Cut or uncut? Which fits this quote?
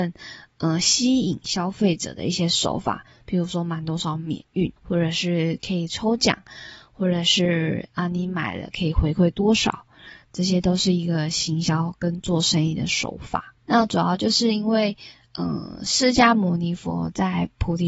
cut